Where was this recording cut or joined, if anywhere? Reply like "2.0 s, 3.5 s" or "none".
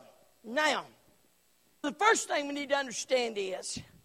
1.8 s